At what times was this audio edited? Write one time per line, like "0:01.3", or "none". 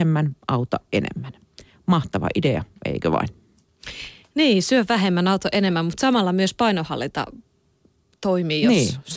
none